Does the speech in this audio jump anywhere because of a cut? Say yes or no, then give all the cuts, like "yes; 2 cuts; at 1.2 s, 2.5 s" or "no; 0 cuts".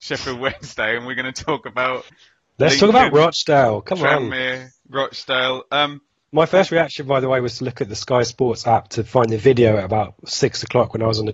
yes; 1 cut; at 4.8 s